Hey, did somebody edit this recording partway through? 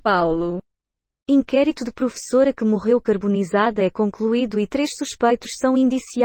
no; 0 cuts

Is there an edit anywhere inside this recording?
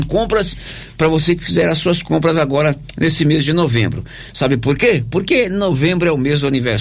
no; 0 cuts

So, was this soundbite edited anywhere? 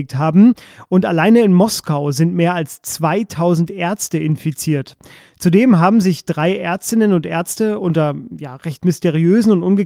no; 0 cuts

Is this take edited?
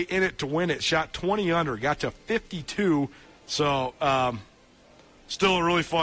yes; 1 cut; at 3.2 s

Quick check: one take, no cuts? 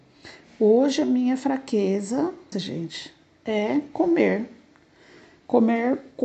no; 1 cut; at 2.5 s

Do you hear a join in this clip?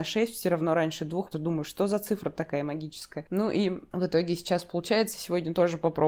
yes; 1 cut; at 1.3 s

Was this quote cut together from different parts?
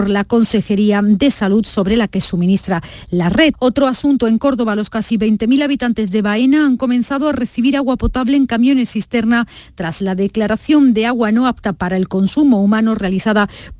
yes; 1 cut; at 3.5 s

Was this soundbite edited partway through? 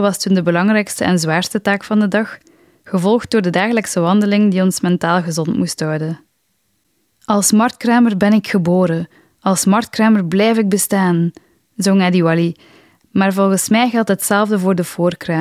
yes; 1 cut; at 7.1 s

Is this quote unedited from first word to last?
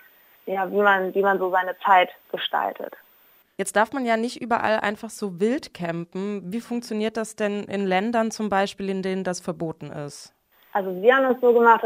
yes; 0 cuts

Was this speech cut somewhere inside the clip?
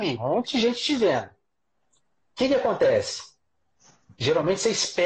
no; 0 cuts

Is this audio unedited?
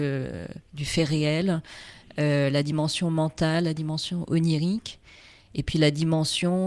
yes; 0 cuts

